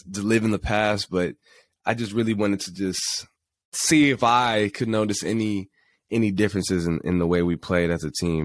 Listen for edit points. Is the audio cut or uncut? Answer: uncut